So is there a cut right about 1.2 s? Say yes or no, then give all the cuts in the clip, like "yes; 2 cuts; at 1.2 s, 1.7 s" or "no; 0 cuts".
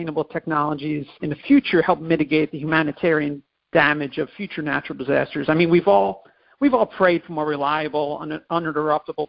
yes; 1 cut; at 1.2 s